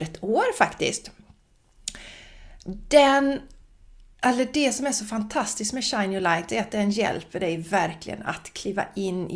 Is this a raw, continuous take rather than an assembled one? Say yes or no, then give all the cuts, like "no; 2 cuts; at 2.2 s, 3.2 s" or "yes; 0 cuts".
yes; 0 cuts